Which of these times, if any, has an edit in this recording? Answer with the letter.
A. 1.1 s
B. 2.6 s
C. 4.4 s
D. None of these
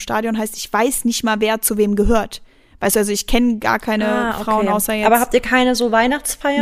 D